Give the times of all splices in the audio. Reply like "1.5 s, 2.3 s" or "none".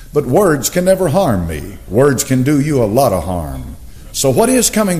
1.9 s, 4.1 s